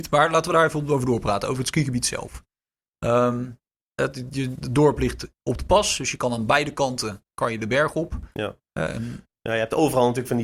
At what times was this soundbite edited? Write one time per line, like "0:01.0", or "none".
none